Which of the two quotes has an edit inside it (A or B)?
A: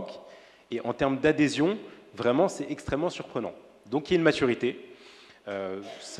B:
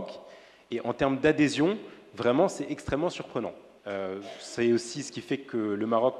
B